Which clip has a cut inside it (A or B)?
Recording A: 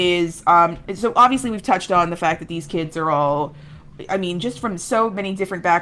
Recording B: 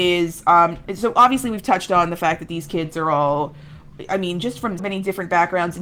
B